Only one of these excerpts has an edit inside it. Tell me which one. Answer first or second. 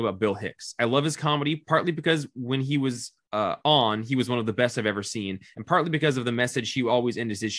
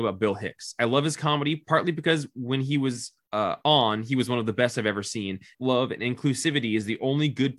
second